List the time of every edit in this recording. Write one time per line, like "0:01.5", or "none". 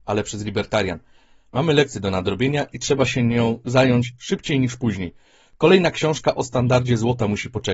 none